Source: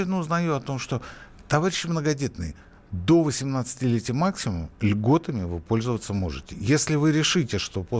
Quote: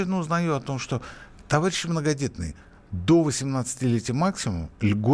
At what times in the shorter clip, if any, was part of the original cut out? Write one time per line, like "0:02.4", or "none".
none